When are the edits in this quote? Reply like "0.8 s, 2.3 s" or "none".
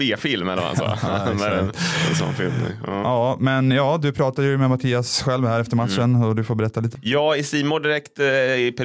6.9 s